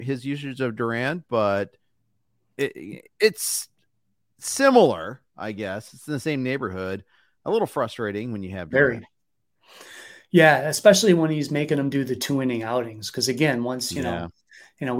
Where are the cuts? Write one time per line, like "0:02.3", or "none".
none